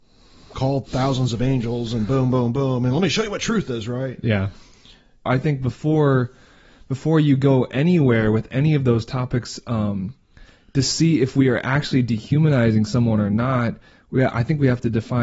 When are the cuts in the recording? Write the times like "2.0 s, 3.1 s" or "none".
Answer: 5.3 s